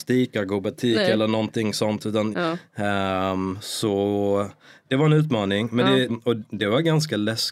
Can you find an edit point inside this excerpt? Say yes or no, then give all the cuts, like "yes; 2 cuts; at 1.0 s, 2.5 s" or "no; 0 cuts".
yes; 2 cuts; at 2.3 s, 6.1 s